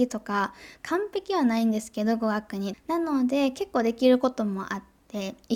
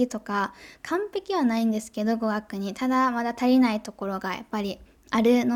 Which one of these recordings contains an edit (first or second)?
first